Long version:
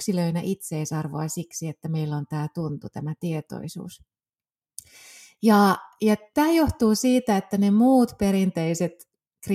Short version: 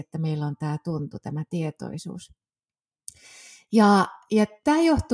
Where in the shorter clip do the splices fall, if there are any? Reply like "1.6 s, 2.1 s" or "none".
none